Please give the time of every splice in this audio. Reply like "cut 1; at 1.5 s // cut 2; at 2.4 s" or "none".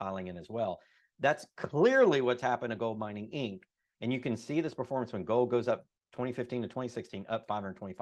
cut 1; at 3.9 s